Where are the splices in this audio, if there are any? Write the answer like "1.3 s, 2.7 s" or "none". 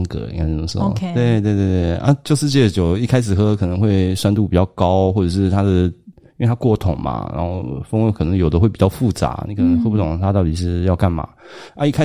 none